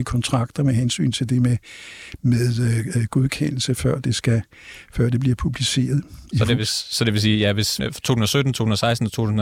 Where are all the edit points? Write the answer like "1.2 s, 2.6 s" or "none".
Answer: 6.3 s, 7.8 s